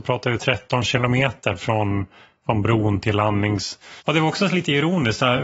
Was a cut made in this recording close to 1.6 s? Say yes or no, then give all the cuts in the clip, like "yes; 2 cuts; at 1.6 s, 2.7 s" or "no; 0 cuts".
no; 1 cut; at 4.0 s